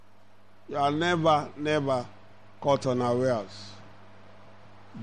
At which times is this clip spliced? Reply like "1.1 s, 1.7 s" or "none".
1.5 s